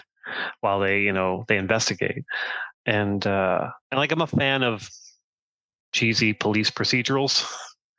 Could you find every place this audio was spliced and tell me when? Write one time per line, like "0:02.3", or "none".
0:02.7
0:03.8